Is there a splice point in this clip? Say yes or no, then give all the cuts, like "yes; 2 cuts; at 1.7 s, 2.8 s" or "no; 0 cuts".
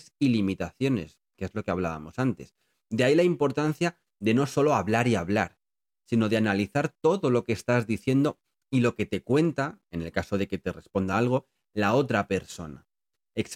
no; 0 cuts